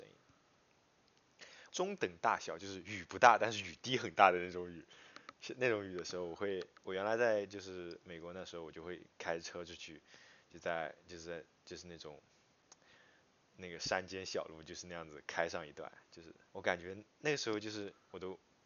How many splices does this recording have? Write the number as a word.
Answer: two